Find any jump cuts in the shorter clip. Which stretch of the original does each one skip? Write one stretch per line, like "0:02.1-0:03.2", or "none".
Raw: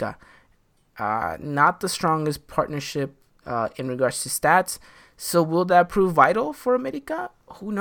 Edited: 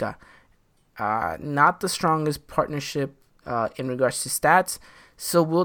none